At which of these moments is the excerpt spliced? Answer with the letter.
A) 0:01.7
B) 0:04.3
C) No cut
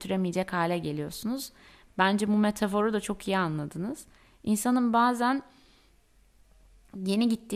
C